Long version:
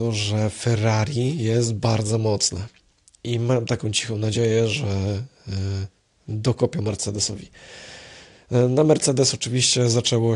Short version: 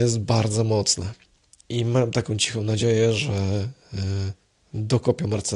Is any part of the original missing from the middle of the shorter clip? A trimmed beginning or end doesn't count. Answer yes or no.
no